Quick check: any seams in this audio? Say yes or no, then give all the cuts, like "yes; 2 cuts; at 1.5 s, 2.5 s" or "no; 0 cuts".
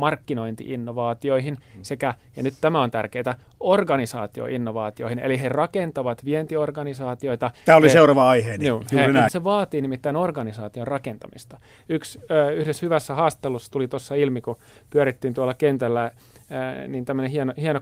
yes; 1 cut; at 9.3 s